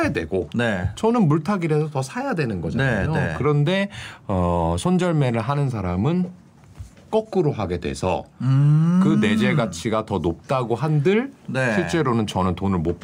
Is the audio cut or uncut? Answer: uncut